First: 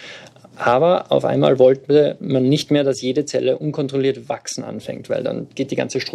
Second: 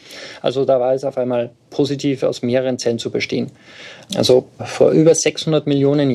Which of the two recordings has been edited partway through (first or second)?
second